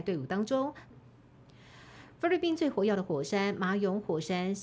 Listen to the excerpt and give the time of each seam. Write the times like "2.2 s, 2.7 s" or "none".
0.9 s